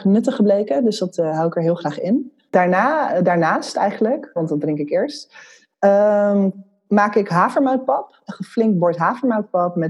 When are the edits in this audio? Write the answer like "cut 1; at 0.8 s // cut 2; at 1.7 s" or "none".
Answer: cut 1; at 4.4 s

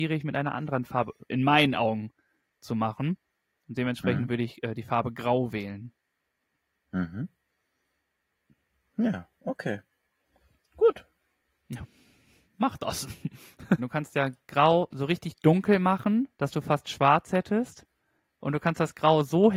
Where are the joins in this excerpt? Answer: cut 1; at 13.8 s // cut 2; at 16.3 s

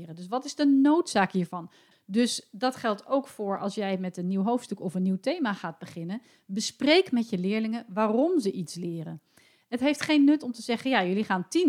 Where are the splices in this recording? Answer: cut 1; at 1.9 s

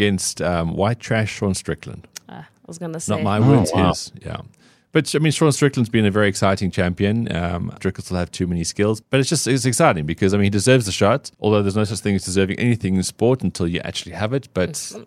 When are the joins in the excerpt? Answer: cut 1; at 7.8 s // cut 2; at 9.0 s // cut 3; at 11.3 s

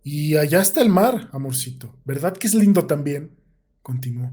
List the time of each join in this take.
none

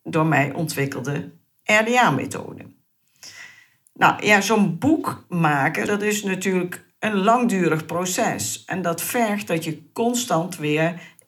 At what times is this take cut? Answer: cut 1; at 5.9 s

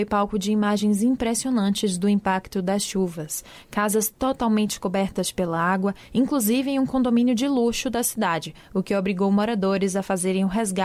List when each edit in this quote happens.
none

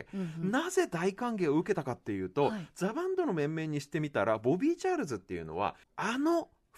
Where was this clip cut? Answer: cut 1; at 5.8 s

